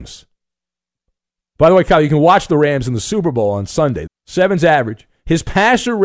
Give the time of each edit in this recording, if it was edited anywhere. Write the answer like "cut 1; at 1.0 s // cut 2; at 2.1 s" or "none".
cut 1; at 4.1 s